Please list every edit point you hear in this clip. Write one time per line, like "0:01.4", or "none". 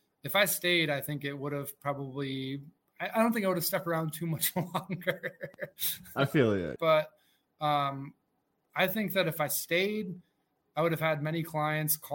0:06.8